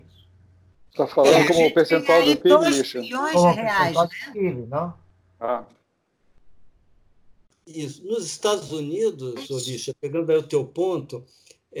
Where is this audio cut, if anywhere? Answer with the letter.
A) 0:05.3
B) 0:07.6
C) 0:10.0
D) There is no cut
B